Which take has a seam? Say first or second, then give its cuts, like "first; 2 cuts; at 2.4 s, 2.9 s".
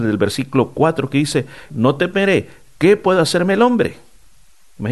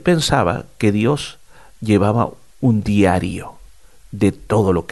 first; 1 cut; at 1.7 s